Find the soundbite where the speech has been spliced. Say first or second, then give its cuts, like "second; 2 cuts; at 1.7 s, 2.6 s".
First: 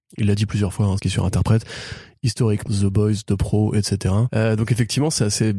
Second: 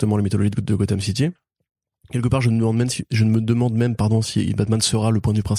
first; 2 cuts; at 1.0 s, 2.7 s